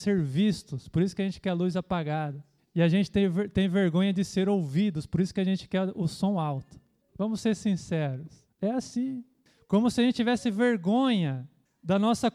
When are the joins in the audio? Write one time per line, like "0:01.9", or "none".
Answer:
0:07.1